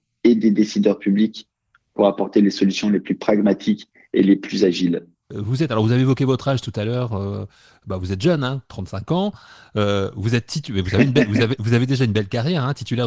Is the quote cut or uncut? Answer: uncut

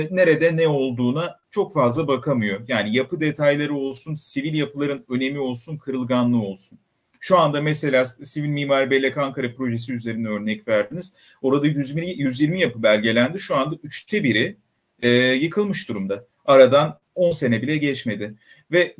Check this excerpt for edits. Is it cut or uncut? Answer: uncut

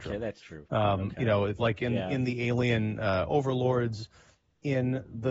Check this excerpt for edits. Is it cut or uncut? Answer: uncut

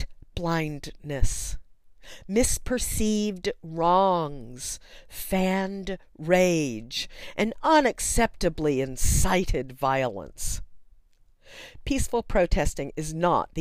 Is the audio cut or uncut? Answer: uncut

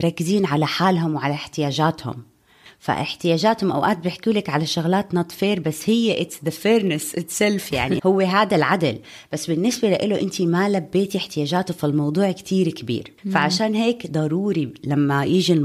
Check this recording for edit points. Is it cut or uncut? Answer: cut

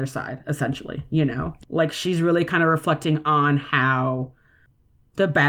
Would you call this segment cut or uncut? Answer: cut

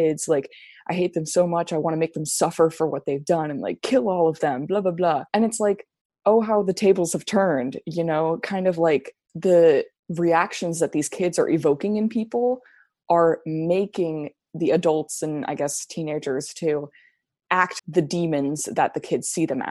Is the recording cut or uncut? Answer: cut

